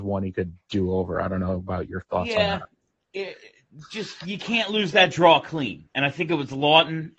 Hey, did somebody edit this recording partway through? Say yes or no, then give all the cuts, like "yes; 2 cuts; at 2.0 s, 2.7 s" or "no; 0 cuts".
no; 0 cuts